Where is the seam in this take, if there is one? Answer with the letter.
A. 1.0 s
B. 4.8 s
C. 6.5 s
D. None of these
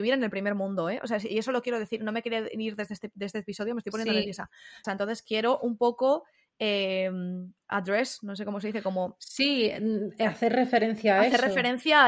B